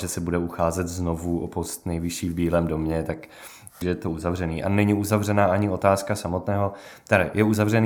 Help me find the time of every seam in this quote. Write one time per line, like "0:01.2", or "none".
0:03.8